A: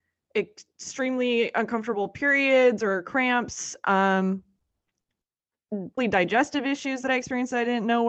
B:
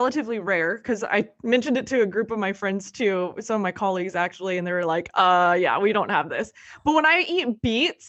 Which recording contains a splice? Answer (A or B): A